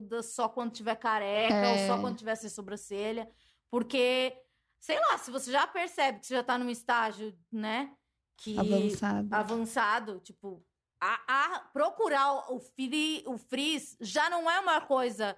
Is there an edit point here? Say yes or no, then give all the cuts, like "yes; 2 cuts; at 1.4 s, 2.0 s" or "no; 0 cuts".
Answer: no; 0 cuts